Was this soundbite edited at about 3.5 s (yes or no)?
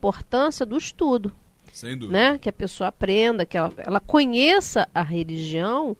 no